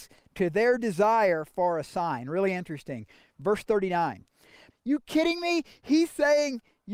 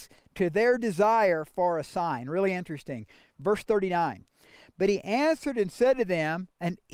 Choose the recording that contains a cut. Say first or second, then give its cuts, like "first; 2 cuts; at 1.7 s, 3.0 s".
first; 1 cut; at 4.7 s